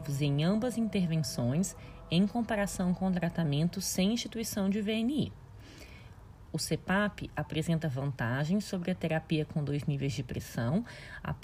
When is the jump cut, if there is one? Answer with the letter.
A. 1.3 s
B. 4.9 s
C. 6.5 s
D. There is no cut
C